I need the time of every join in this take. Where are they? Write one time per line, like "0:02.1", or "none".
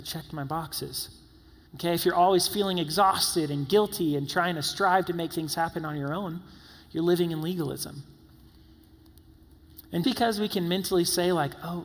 0:01.7
0:10.0